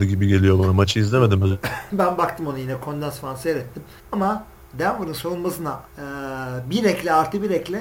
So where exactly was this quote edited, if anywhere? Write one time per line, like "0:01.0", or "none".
0:01.9
0:04.0
0:05.9